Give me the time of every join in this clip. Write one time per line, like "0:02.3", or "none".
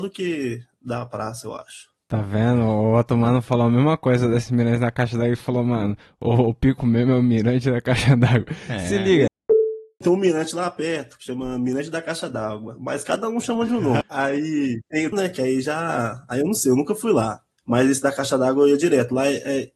0:09.3
0:14.0
0:15.1